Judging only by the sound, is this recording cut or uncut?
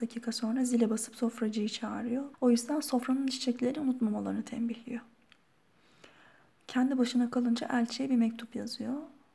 cut